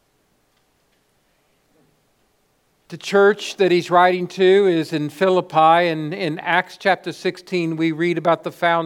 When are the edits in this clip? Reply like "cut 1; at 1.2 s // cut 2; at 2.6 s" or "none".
none